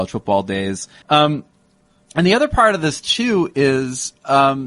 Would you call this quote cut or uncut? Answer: cut